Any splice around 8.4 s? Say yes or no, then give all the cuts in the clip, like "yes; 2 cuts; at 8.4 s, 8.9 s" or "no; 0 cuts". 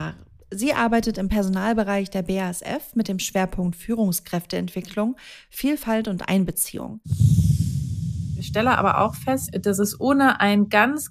no; 0 cuts